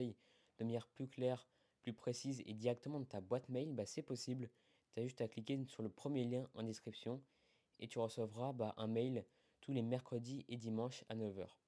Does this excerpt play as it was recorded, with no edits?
yes; 0 cuts

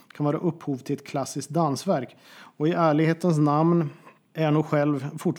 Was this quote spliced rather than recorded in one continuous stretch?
yes; 1 cut; at 2.2 s

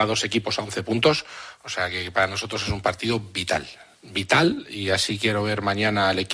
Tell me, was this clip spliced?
no; 0 cuts

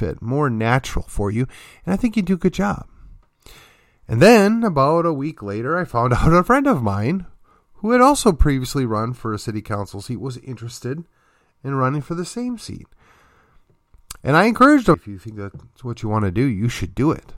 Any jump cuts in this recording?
yes; 1 cut; at 14.9 s

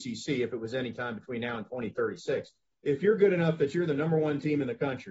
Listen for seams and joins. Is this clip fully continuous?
no; 1 cut; at 2.7 s

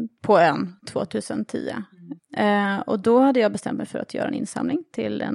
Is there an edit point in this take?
yes; 1 cut; at 2.2 s

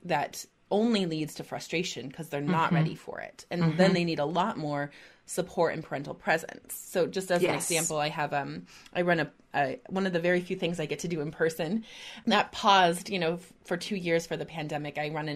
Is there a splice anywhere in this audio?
no; 0 cuts

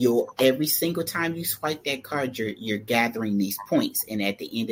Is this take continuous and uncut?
yes; 0 cuts

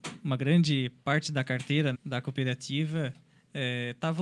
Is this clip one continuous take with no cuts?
no; 1 cut; at 1.9 s

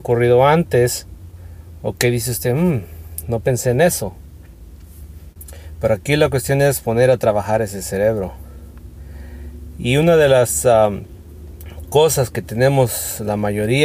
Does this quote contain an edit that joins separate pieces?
no; 0 cuts

